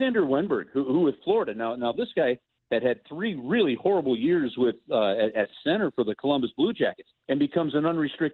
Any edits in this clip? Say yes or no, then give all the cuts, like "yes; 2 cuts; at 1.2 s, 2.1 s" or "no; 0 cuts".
yes; 1 cut; at 7.2 s